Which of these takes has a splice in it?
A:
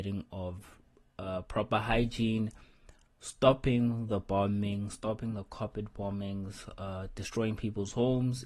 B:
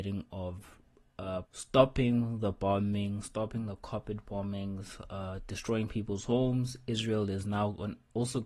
B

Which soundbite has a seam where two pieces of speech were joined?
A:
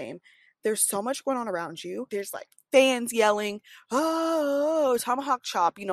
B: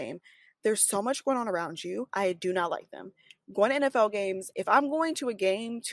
B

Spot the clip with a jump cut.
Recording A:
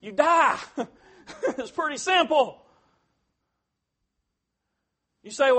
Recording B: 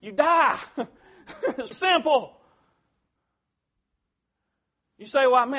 B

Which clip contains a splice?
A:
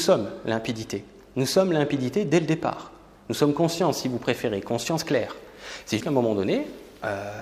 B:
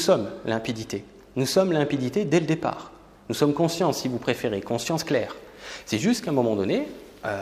A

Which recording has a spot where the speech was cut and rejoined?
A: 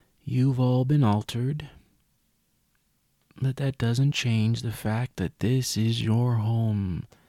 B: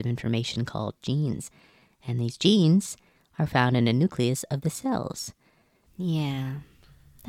B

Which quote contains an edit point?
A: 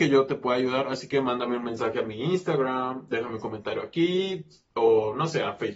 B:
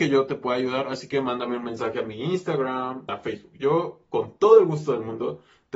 B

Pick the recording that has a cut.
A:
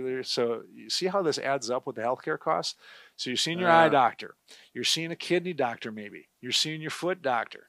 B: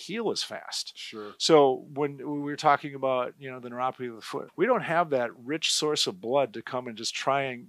B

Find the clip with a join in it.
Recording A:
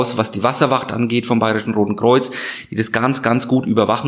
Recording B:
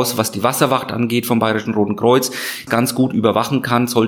B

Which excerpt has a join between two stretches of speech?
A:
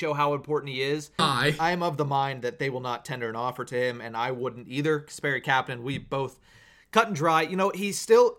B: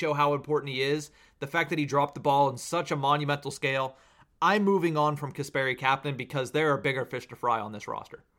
A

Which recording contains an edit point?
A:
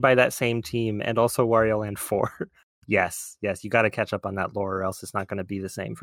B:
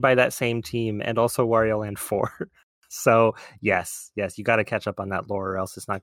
A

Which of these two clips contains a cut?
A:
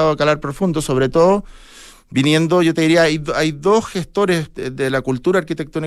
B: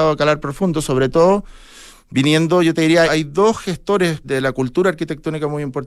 B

